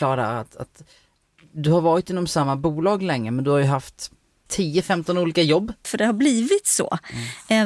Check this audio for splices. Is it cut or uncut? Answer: cut